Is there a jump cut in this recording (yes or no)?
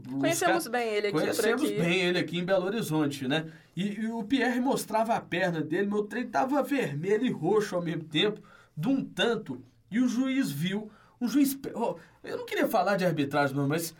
no